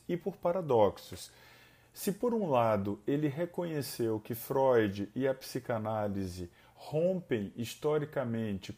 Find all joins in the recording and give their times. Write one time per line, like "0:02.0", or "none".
none